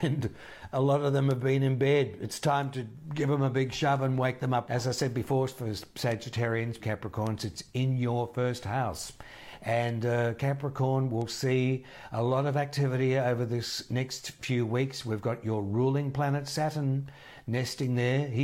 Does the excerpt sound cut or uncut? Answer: cut